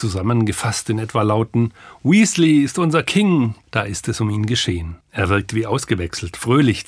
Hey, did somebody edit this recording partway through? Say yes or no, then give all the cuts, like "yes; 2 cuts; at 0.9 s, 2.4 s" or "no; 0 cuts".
yes; 2 cuts; at 3.6 s, 5.0 s